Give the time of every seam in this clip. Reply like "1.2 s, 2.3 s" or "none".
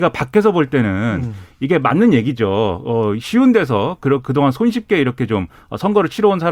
none